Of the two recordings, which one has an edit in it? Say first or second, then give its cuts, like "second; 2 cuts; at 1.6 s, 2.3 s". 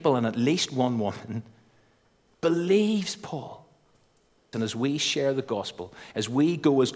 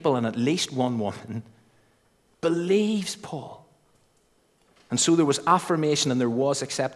first; 1 cut; at 4.5 s